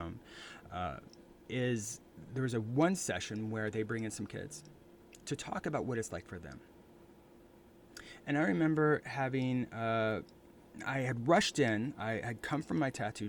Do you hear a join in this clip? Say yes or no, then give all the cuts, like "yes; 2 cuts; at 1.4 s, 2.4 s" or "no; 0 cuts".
no; 0 cuts